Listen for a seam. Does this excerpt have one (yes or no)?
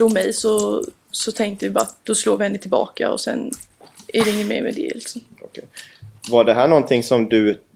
no